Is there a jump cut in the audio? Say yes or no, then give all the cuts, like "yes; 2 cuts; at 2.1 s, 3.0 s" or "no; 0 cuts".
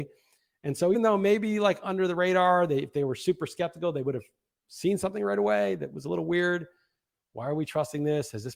yes; 1 cut; at 0.9 s